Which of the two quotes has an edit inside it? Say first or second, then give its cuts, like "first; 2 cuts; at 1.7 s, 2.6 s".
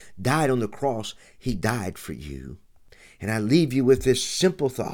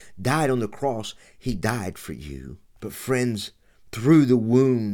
second; 1 cut; at 2.8 s